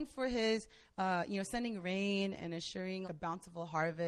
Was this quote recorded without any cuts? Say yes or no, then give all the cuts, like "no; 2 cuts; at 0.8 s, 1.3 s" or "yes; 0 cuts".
no; 1 cut; at 3.0 s